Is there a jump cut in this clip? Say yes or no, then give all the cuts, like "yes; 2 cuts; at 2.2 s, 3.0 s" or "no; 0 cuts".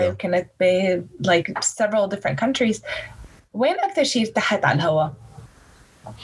no; 0 cuts